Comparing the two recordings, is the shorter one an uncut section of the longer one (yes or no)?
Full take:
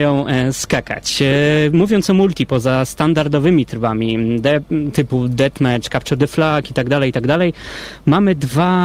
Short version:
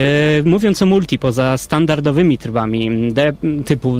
yes